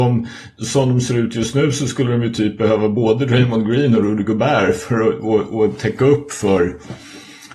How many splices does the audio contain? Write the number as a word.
zero